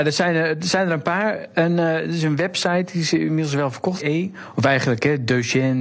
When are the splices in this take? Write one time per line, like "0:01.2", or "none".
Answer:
0:04.0